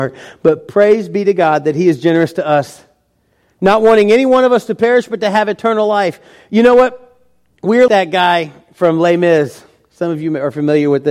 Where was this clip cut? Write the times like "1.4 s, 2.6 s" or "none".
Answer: 7.9 s